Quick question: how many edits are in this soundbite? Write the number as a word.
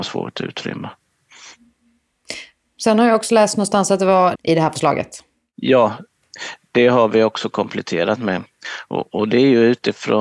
one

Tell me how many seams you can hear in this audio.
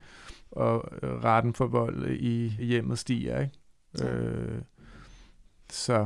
one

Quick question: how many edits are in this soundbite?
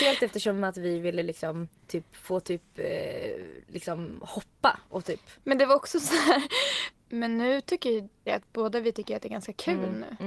three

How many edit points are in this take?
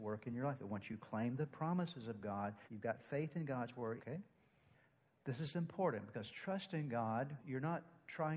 three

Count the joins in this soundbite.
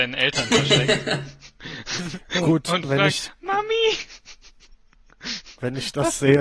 zero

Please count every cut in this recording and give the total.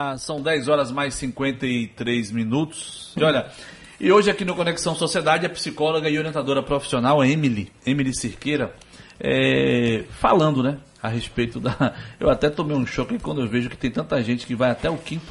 one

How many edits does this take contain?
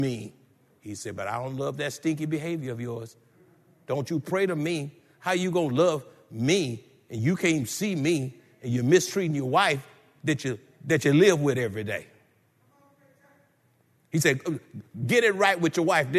zero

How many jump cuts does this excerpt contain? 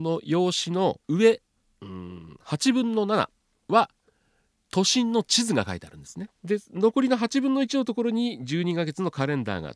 two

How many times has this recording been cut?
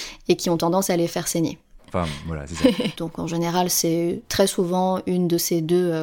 two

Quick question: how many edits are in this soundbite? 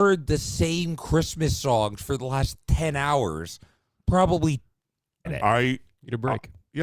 one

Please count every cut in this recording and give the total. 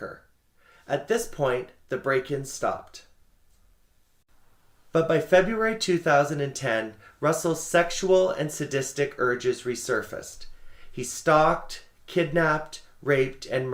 zero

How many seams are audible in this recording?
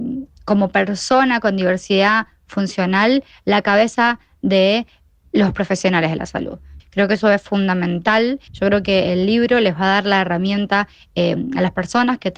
three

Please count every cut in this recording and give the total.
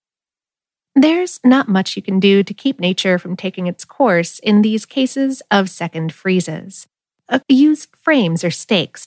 one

